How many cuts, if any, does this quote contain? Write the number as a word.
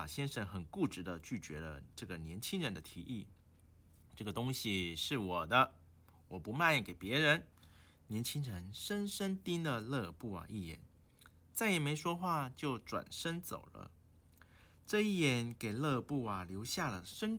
one